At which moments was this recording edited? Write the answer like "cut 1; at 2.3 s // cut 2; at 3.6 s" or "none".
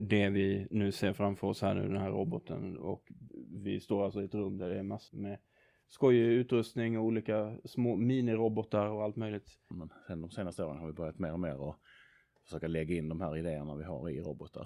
cut 1; at 5.1 s // cut 2; at 9.7 s

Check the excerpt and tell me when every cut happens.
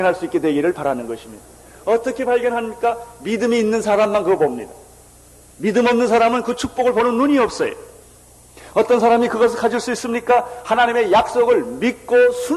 none

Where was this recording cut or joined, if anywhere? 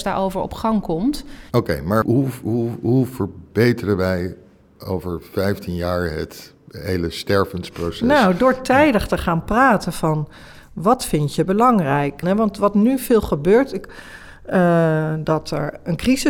cut 1; at 2.0 s // cut 2; at 12.2 s

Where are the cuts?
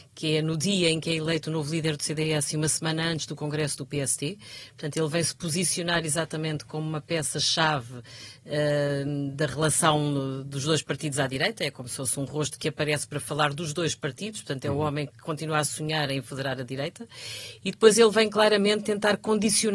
none

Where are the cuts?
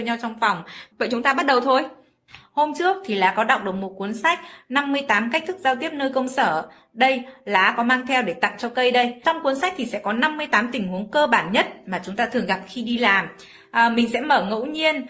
cut 1; at 0.9 s

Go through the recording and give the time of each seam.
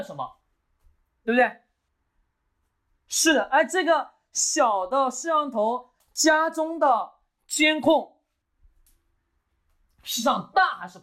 none

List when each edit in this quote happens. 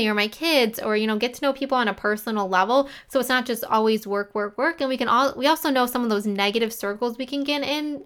none

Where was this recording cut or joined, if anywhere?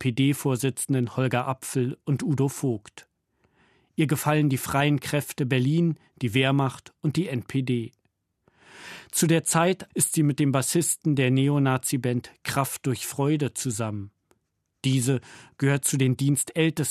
cut 1; at 9.9 s

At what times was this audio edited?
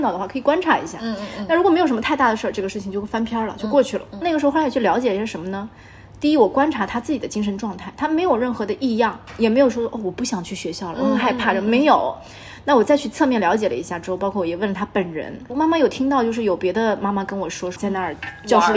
cut 1; at 4.2 s // cut 2; at 15.5 s // cut 3; at 17.8 s

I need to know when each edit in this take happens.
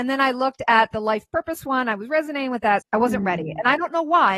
cut 1; at 2.8 s

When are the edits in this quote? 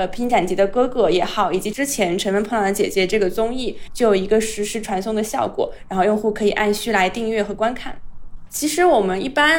cut 1; at 3.9 s // cut 2; at 8.5 s

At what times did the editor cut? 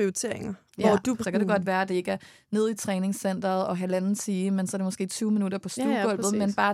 cut 1; at 1.2 s

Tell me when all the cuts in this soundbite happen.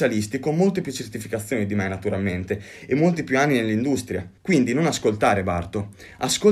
cut 1; at 4.4 s

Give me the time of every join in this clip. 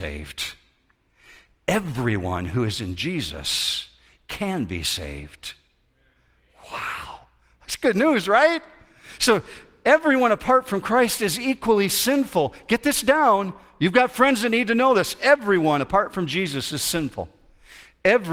none

